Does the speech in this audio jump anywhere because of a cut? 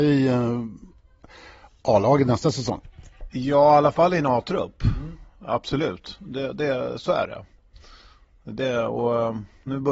no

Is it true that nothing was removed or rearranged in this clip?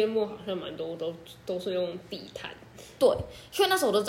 yes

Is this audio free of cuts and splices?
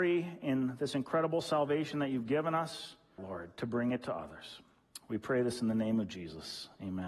no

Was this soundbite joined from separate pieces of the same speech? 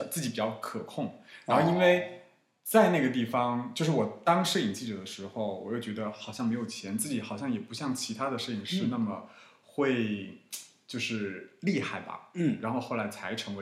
no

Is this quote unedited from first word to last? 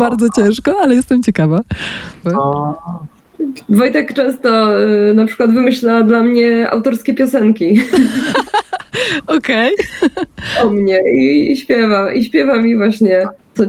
no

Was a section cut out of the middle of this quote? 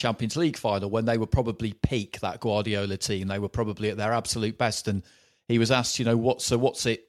no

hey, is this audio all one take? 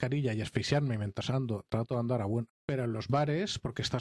no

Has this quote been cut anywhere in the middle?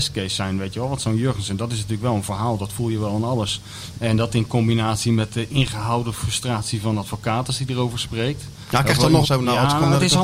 yes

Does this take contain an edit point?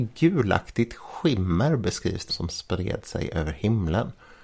yes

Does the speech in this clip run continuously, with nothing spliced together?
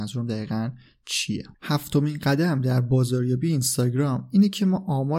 no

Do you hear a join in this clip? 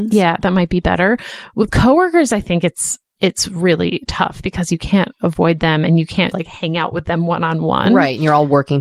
yes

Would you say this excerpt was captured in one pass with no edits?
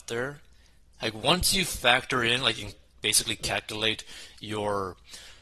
no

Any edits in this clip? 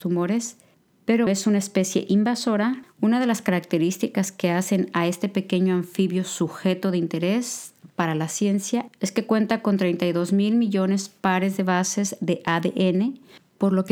yes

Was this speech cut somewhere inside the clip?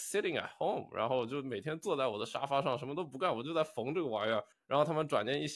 yes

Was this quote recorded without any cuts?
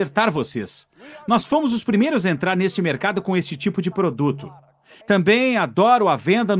no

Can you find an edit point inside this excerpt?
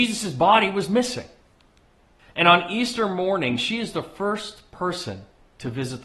yes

